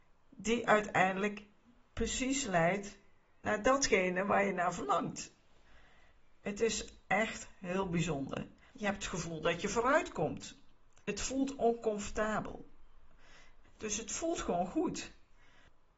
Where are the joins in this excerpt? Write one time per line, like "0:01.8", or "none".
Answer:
0:08.7
0:11.0
0:13.6

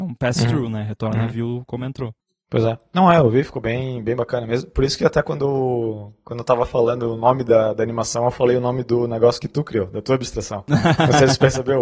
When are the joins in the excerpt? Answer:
none

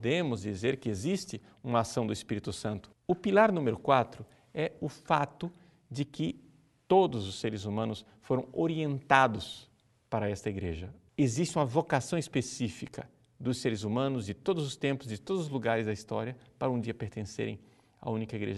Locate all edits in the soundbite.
0:02.9
0:11.1

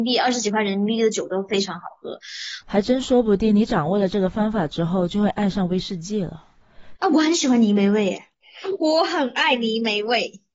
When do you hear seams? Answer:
0:02.6
0:06.9

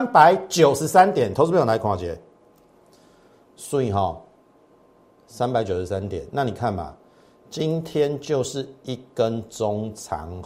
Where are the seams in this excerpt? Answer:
none

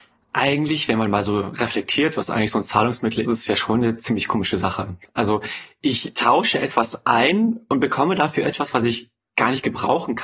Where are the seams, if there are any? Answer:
0:03.2

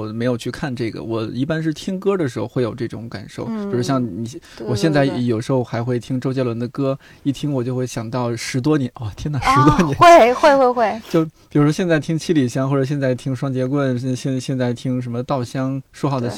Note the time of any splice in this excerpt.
none

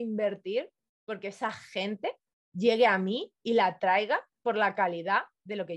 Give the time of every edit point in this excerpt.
none

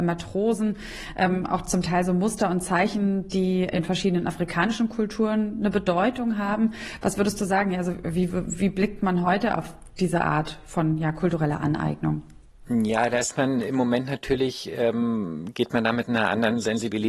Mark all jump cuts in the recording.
0:03.7

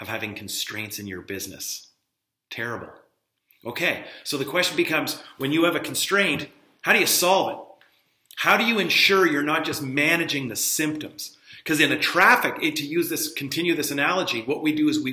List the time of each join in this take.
none

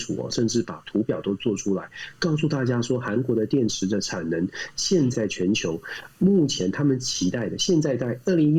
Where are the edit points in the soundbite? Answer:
0:05.1

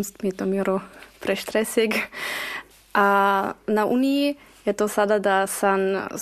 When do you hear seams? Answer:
none

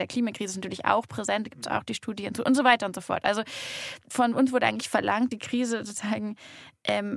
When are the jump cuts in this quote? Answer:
none

